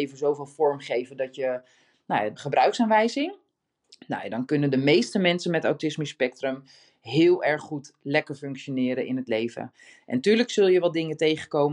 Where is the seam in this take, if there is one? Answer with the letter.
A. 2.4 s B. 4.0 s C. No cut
A